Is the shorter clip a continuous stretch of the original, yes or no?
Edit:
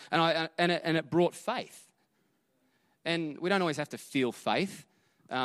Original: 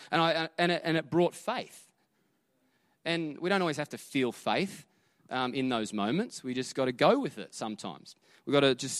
yes